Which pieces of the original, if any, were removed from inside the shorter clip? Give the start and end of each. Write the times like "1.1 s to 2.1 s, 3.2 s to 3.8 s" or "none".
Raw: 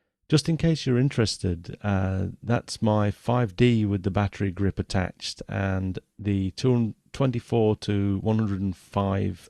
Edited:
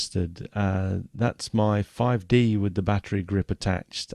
none